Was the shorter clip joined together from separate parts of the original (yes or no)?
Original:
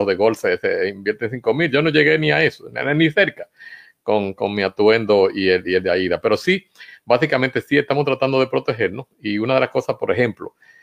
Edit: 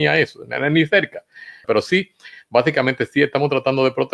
yes